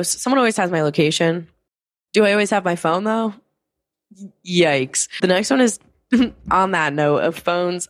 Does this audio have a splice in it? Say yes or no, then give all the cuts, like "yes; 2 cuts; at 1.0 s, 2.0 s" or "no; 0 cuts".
no; 0 cuts